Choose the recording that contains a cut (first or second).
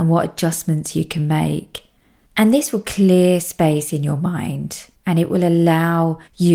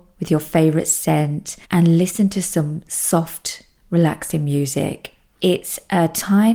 second